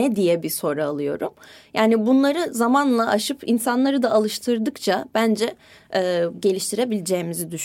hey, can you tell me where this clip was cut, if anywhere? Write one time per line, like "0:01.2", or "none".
0:06.3